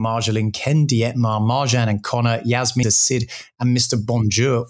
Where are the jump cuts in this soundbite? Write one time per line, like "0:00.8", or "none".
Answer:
0:02.8